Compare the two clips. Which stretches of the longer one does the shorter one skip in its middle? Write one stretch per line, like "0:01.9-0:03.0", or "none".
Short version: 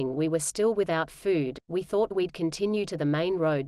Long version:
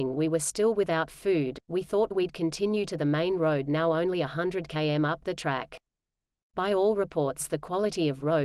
none